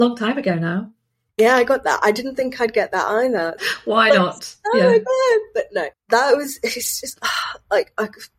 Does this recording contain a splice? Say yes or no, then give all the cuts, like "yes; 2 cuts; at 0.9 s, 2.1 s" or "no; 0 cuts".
yes; 2 cuts; at 3.6 s, 5.9 s